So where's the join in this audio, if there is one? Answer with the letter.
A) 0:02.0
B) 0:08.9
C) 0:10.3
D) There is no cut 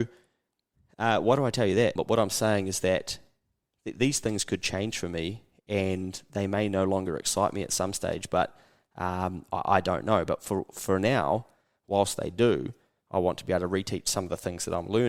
A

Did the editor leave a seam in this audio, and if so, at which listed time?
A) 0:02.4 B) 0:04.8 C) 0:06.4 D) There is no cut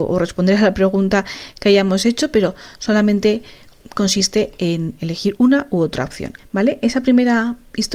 C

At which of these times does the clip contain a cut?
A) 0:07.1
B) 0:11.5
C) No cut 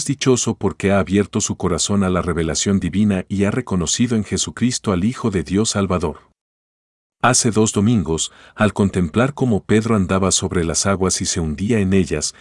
A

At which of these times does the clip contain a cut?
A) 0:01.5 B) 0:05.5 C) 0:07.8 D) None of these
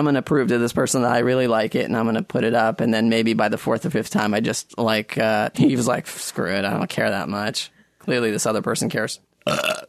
B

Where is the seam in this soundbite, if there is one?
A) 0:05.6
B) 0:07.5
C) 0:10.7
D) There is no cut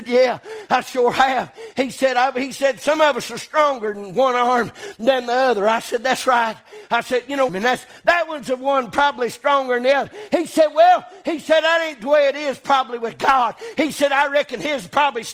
B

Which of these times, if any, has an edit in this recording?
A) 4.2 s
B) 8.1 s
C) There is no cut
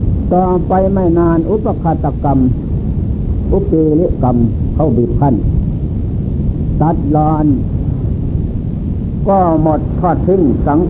A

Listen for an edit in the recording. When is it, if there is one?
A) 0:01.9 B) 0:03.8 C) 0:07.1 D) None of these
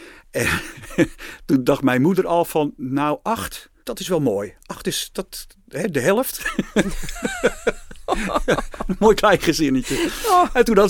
B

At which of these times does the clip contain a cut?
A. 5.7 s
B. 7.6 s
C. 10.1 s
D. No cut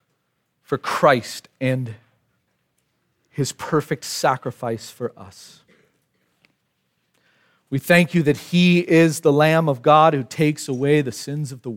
D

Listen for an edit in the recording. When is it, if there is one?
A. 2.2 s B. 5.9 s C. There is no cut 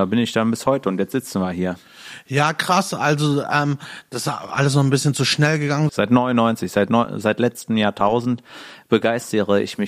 B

